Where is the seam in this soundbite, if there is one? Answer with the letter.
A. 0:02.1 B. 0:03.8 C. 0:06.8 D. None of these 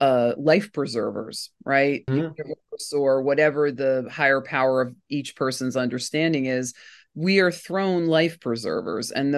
A